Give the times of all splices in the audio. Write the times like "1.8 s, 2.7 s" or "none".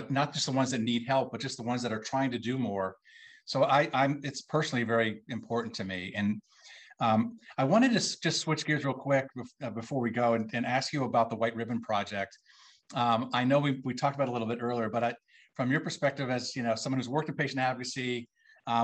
none